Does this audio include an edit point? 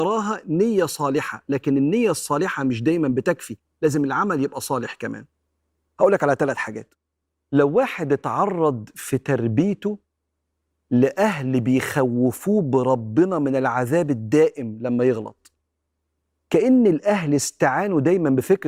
no; 0 cuts

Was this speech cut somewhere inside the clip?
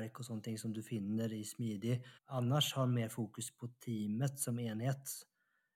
yes; 1 cut; at 2.2 s

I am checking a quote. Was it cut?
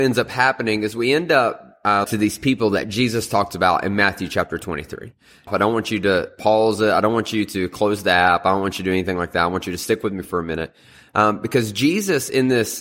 yes; 2 cuts; at 2.0 s, 5.5 s

